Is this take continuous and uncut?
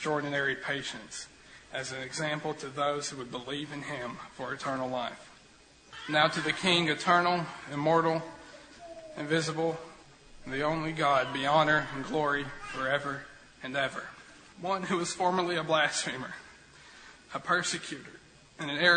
no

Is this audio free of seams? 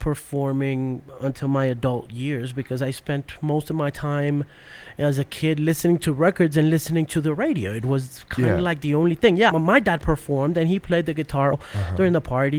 no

